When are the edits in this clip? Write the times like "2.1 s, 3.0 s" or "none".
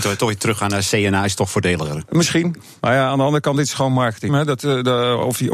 2.8 s, 4.3 s